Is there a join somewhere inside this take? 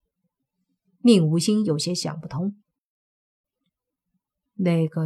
no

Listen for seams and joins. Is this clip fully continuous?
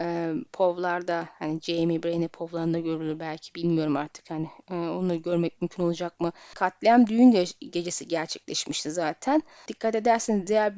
no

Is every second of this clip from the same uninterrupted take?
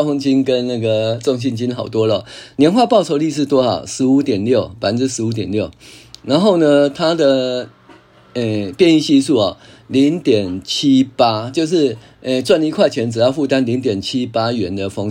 yes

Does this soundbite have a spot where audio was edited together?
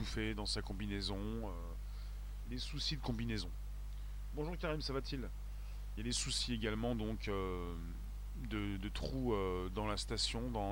no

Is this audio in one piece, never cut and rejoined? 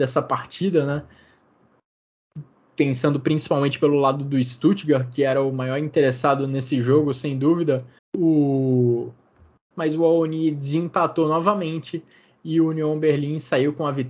no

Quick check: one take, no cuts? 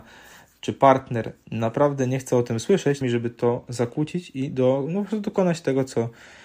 no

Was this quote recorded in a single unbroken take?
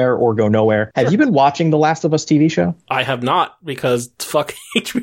yes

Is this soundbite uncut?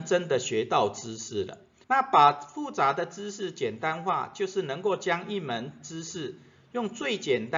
no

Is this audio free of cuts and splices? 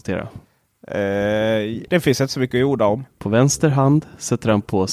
no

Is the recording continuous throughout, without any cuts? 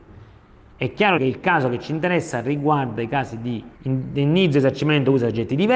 no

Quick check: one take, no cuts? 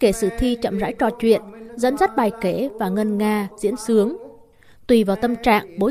yes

